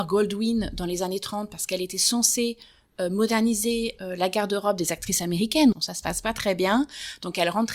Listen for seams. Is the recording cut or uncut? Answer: cut